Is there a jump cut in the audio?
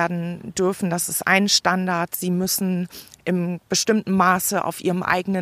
no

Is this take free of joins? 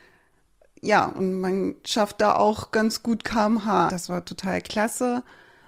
no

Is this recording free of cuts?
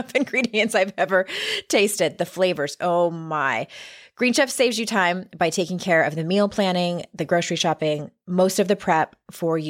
yes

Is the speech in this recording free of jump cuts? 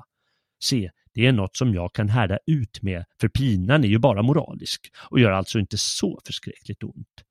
yes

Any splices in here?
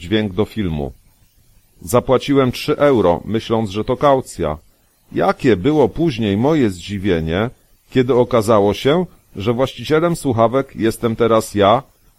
no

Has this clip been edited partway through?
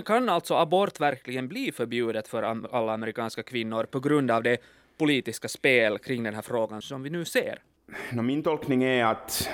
no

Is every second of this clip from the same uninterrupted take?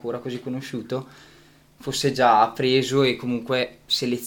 yes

